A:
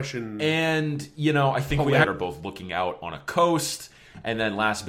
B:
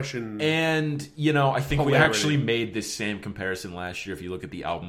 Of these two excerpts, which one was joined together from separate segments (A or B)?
A